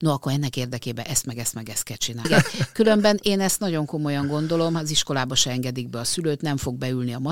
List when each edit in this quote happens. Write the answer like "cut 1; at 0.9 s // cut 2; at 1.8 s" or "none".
cut 1; at 2.3 s